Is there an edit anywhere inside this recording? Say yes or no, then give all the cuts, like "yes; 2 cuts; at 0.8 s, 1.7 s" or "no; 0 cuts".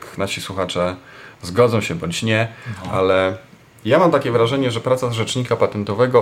yes; 1 cut; at 1.3 s